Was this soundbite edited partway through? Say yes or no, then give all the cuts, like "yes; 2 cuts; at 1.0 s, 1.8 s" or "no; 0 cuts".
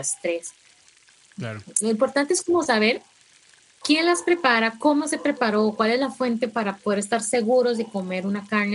no; 0 cuts